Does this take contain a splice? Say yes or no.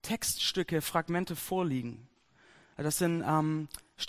no